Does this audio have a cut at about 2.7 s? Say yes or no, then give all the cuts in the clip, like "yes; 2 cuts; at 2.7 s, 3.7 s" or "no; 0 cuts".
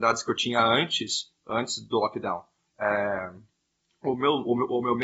yes; 1 cut; at 2.7 s